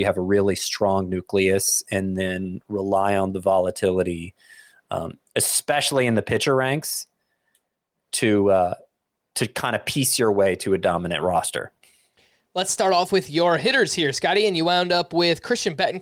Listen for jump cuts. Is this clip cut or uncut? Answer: uncut